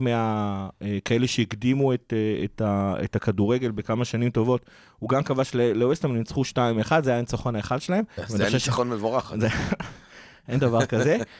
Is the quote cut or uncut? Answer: cut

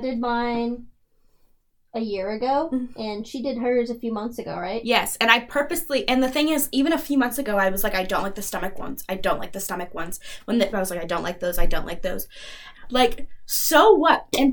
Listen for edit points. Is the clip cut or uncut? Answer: cut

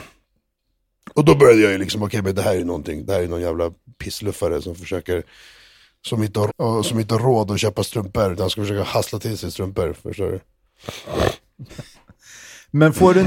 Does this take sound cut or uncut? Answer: cut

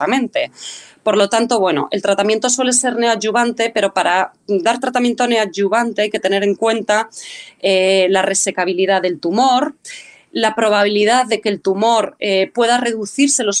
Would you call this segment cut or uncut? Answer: uncut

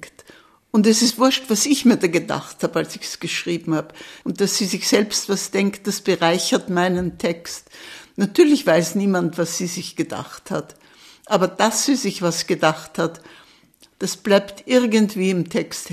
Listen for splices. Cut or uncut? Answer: cut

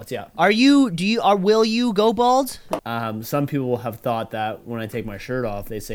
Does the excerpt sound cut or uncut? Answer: cut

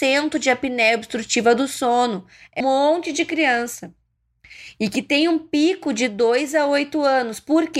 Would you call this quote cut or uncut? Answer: cut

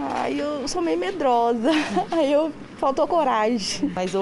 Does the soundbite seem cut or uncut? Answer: uncut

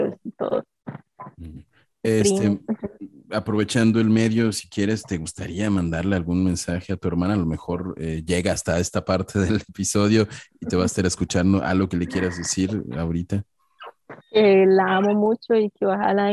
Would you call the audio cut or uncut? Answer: cut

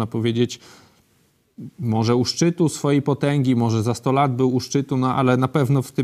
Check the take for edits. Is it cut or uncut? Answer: uncut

